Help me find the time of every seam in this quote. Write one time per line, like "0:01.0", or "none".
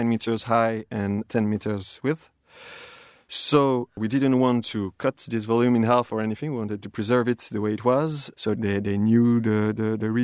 0:08.3